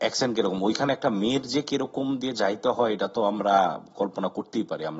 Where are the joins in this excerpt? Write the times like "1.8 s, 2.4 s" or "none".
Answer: none